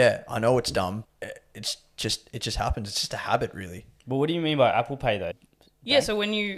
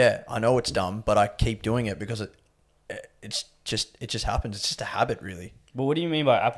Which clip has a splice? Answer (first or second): first